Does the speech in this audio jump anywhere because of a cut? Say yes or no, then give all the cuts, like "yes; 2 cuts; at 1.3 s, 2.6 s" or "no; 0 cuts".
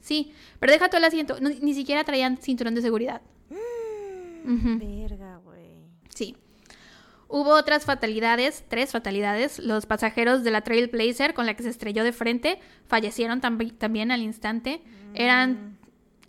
no; 0 cuts